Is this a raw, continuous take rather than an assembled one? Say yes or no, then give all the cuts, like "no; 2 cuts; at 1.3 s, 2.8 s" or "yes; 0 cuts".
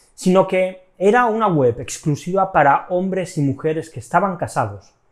yes; 0 cuts